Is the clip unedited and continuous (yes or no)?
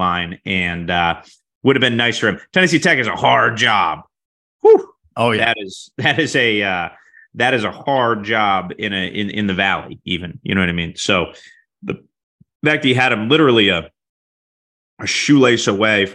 yes